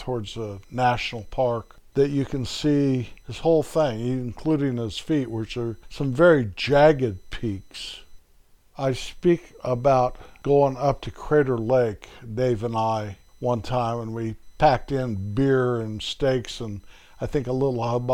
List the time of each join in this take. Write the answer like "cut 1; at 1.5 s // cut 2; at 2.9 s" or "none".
none